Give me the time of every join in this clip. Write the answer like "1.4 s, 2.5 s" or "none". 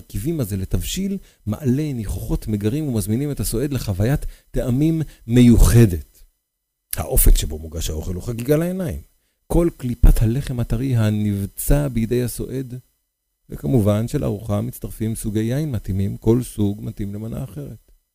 none